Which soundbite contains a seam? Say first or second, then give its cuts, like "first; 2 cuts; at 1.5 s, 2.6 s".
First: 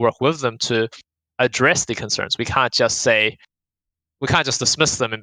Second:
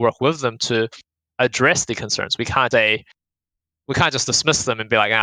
second; 1 cut; at 2.7 s